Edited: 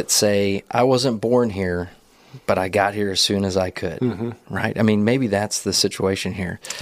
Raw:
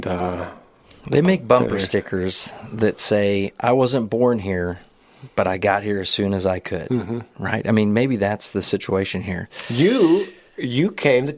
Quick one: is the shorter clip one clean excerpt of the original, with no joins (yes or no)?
yes